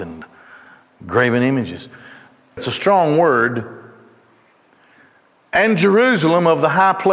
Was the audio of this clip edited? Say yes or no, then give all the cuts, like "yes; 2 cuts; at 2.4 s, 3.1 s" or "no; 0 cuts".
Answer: yes; 1 cut; at 2.6 s